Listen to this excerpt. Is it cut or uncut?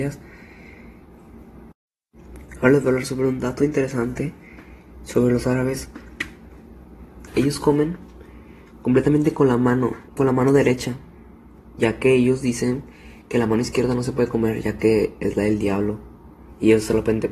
cut